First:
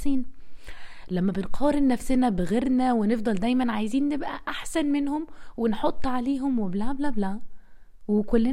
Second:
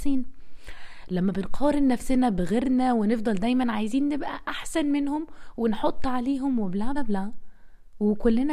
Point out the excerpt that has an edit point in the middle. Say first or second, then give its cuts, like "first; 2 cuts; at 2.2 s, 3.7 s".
second; 1 cut; at 6.9 s